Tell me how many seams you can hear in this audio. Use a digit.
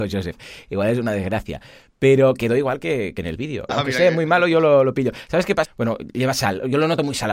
2